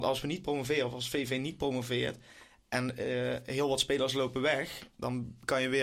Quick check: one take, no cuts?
yes; 0 cuts

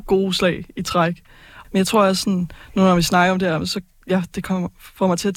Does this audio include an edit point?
yes; 1 cut; at 1.6 s

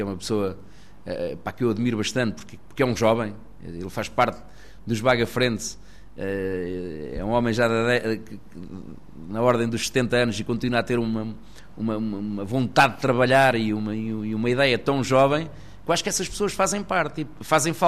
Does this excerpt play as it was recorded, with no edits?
yes; 0 cuts

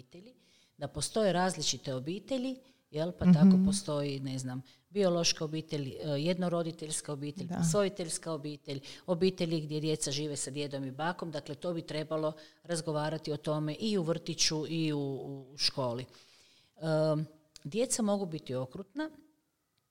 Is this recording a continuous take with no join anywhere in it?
yes; 0 cuts

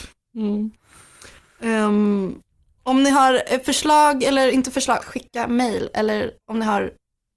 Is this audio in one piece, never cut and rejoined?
no; 1 cut; at 5.0 s

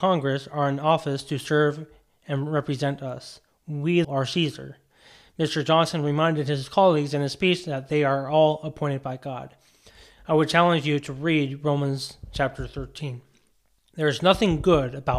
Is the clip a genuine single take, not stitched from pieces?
no; 1 cut; at 4.0 s

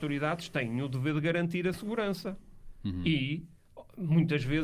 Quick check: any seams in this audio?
no; 0 cuts

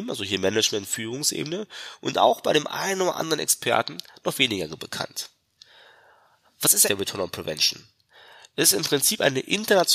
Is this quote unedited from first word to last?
no; 1 cut; at 6.8 s

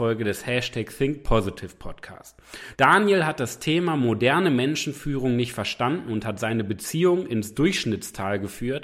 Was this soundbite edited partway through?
yes; 1 cut; at 2.7 s

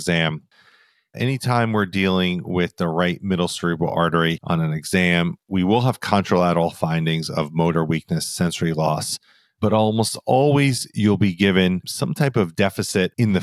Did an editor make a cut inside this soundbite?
no; 0 cuts

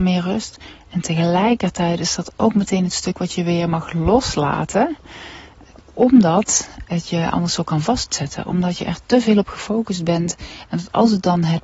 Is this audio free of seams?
no; 1 cut; at 6.9 s

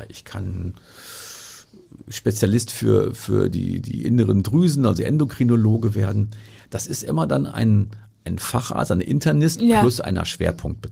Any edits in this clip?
no; 0 cuts

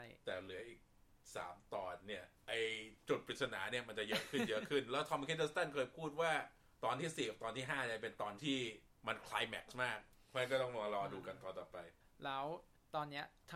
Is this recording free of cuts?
no; 1 cut; at 2.4 s

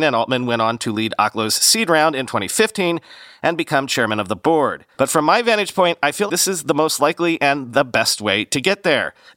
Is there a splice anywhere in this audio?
yes; 2 cuts; at 4.9 s, 6.3 s

